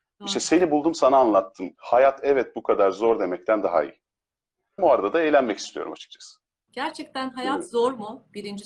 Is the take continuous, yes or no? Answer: no